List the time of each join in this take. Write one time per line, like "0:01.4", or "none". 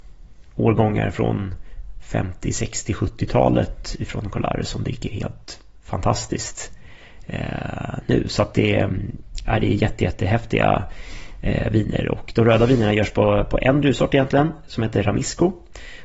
none